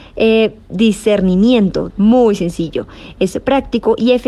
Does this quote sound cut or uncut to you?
cut